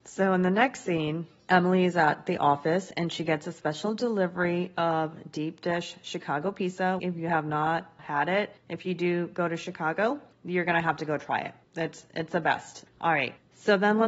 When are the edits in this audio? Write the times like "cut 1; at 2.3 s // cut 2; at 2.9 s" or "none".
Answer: cut 1; at 7.0 s // cut 2; at 12.9 s